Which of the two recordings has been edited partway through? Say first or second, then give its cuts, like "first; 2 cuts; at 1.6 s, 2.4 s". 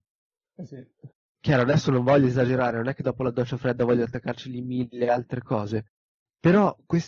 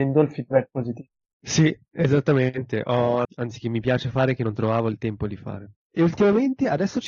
second; 2 cuts; at 3.2 s, 5.7 s